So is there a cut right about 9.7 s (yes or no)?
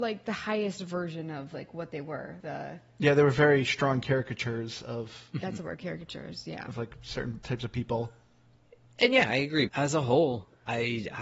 yes